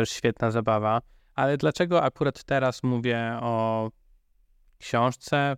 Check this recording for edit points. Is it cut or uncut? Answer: cut